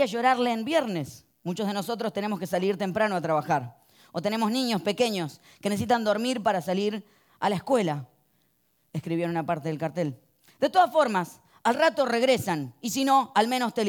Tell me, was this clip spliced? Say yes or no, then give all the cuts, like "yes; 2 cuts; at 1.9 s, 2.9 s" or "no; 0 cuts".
no; 0 cuts